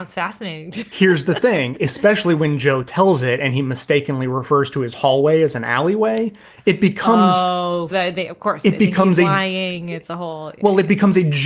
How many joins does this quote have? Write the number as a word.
two